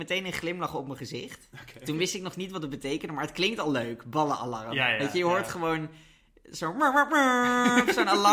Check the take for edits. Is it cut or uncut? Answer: uncut